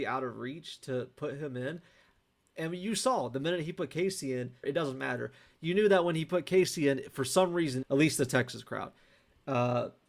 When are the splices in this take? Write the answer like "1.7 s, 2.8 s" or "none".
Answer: 4.6 s, 7.8 s